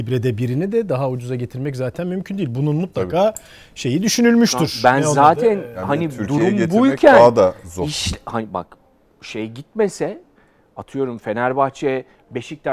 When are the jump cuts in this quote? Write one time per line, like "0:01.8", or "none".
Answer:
none